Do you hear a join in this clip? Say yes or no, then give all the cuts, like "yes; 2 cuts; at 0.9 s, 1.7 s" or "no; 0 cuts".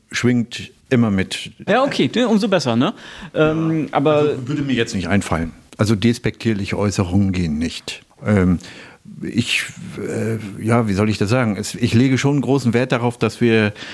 yes; 1 cut; at 1.7 s